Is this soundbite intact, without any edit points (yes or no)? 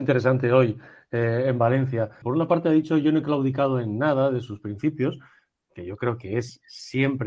no